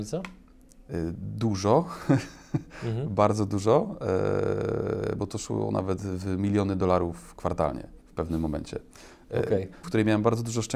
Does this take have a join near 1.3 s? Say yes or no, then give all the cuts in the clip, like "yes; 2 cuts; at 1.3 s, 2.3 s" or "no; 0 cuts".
no; 2 cuts; at 8.0 s, 9.8 s